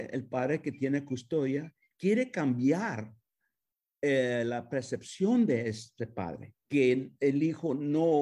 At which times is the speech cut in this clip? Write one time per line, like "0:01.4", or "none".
0:06.6